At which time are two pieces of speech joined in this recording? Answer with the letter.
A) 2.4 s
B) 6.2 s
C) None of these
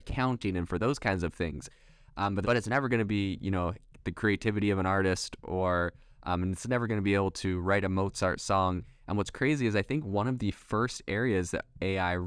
A